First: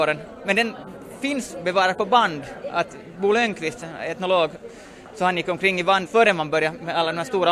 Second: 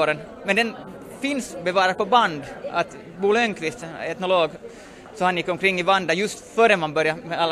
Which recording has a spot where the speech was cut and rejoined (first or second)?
first